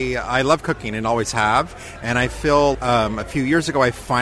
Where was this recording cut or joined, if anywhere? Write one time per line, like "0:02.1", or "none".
0:02.7